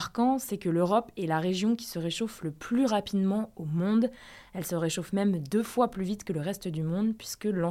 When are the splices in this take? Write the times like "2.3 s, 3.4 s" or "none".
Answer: none